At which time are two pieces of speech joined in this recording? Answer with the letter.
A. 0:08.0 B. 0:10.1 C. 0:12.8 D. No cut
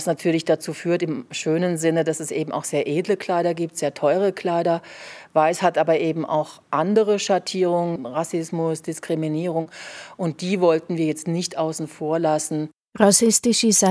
A